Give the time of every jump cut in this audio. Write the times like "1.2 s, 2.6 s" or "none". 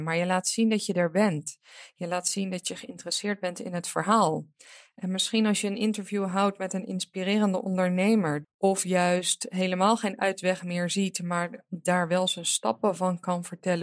8.4 s

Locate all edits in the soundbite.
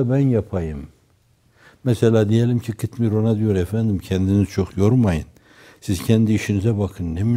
none

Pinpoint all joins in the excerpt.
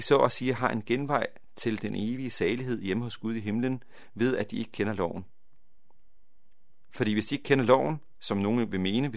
none

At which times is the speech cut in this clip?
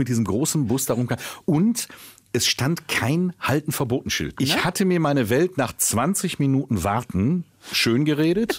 4.4 s

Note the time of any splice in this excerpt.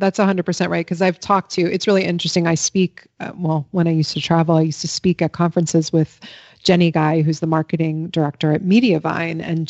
none

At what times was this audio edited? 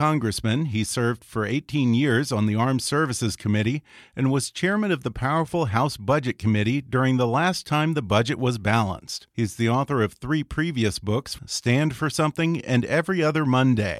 9.3 s, 11.4 s

